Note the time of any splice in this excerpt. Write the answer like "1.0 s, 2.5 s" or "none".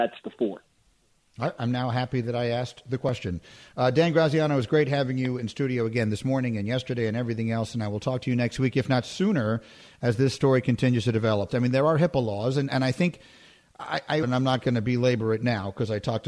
11.5 s, 14.2 s